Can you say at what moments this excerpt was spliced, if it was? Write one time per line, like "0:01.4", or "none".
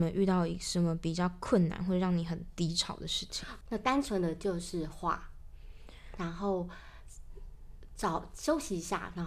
0:03.6